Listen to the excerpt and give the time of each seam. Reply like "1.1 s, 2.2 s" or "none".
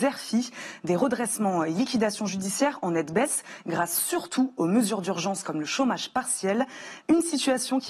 7.0 s